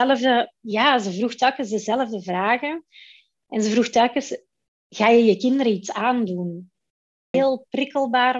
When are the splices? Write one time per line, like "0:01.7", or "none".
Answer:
0:07.3